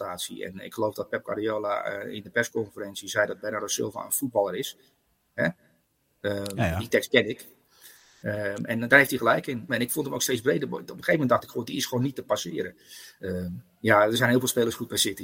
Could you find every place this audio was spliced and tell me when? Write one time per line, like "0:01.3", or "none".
0:09.7
0:13.2

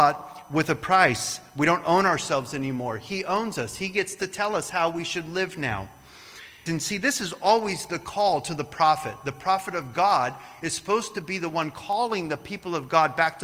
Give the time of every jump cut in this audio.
0:06.7

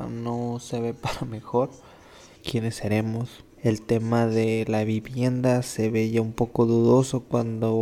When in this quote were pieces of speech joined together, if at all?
0:02.4
0:03.5

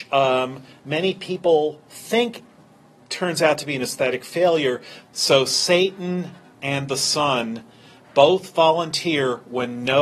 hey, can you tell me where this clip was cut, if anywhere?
0:05.0

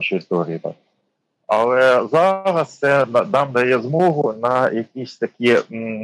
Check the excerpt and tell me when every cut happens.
none

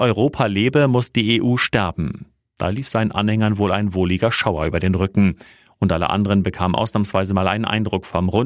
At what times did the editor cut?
none

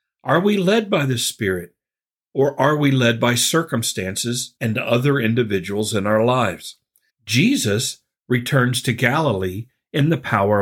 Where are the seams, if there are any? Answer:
0:07.1

